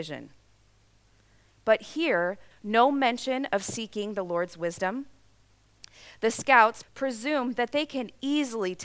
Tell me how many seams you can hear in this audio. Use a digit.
2